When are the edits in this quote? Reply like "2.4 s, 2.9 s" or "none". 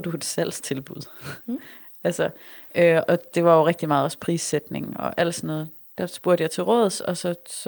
3.1 s

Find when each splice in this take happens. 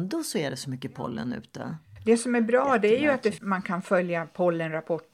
3.4 s

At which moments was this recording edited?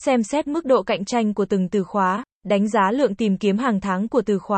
2.3 s

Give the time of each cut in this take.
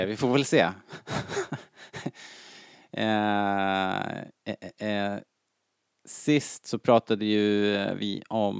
none

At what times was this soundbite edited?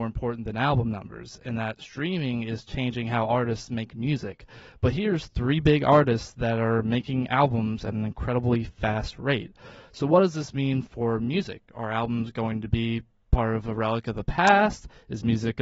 none

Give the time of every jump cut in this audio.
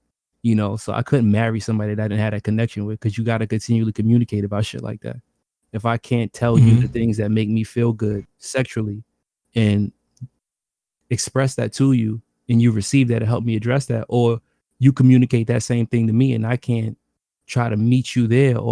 none

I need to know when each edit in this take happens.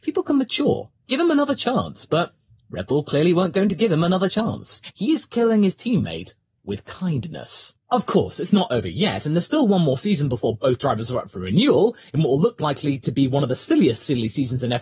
4.9 s

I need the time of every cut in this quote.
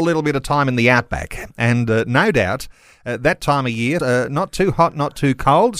4.0 s

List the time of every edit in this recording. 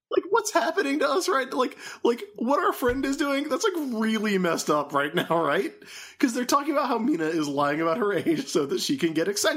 none

